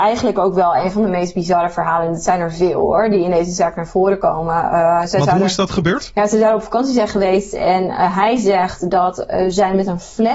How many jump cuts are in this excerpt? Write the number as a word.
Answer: zero